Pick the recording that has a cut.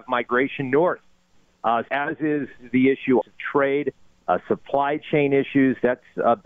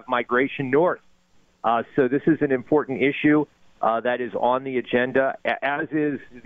first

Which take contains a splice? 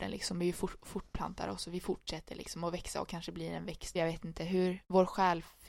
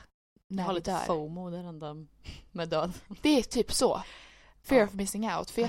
first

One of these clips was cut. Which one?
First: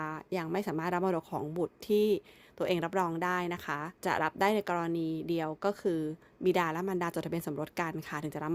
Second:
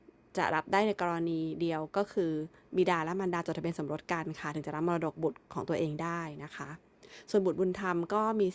first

